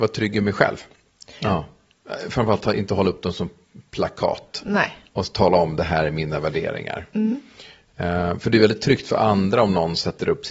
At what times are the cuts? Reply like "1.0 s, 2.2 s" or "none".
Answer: 1.4 s